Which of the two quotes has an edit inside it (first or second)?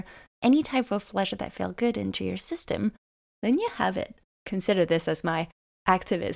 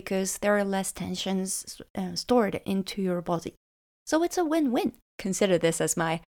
second